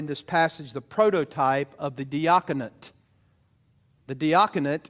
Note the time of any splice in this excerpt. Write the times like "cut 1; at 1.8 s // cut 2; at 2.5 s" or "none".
cut 1; at 4.0 s